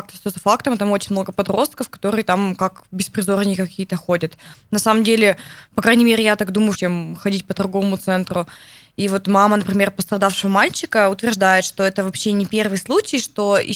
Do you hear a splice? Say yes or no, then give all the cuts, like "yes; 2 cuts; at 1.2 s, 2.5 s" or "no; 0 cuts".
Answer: yes; 1 cut; at 6.7 s